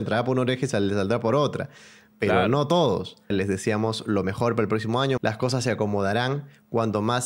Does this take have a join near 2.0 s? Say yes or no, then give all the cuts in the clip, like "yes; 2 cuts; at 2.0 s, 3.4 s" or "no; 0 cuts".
no; 2 cuts; at 3.3 s, 5.2 s